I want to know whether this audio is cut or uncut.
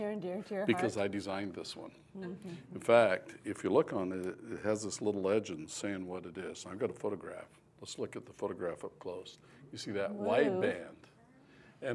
uncut